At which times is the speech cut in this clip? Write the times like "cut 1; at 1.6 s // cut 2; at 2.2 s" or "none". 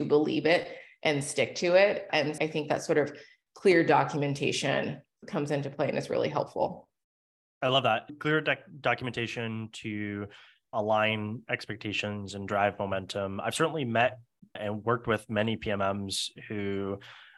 cut 1; at 2.4 s